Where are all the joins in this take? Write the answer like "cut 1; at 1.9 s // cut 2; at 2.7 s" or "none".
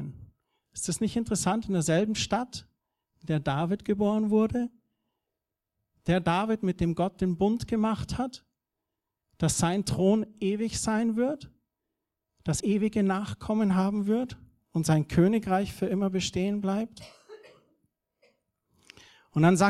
cut 1; at 12.6 s